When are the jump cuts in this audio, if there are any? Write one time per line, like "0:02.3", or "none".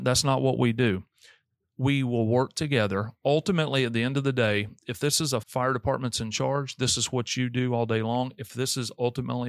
0:05.4